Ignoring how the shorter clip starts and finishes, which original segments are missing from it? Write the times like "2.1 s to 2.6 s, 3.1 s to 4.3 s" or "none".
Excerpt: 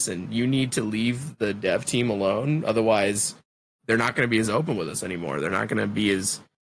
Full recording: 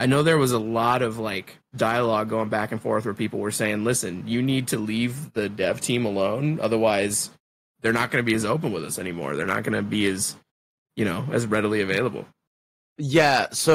none